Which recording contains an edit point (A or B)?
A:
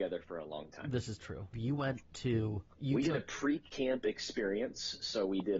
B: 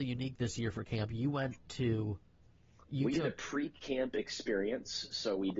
A